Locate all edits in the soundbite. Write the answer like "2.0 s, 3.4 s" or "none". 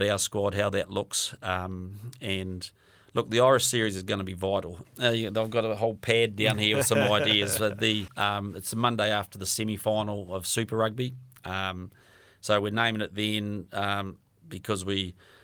4.8 s